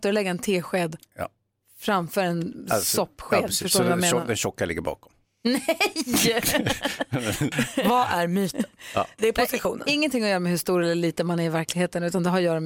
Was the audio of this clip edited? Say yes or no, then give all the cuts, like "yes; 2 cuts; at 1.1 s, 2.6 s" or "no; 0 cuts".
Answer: yes; 2 cuts; at 7.5 s, 9.2 s